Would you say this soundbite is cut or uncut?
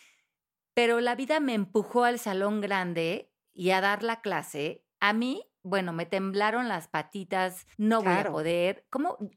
cut